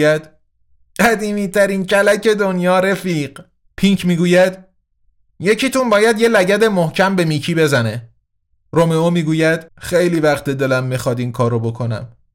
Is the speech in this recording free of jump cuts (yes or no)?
no